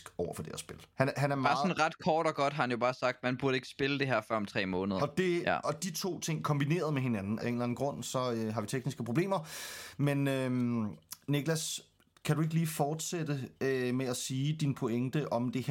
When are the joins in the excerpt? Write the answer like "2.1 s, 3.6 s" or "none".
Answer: 0.9 s, 5.0 s, 7.4 s